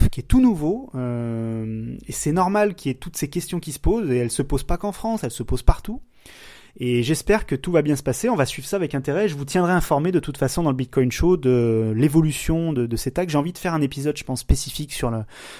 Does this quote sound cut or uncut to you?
uncut